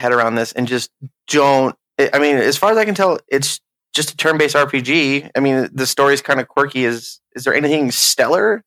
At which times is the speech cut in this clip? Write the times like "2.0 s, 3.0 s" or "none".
none